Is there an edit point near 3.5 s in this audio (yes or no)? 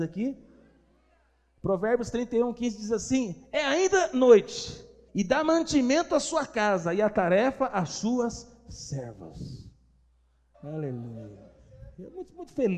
no